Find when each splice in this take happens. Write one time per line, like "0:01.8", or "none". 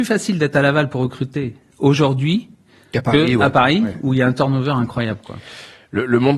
none